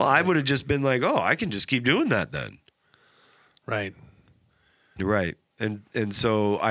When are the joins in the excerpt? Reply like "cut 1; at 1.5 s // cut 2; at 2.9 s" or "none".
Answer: cut 1; at 5.0 s